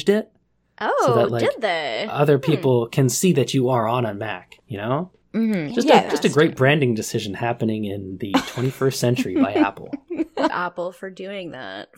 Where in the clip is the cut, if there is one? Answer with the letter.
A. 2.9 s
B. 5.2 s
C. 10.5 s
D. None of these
C